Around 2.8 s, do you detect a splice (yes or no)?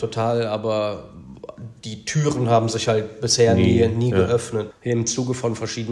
no